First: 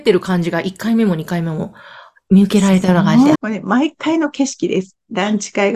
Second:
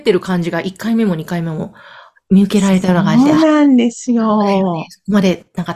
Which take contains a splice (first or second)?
first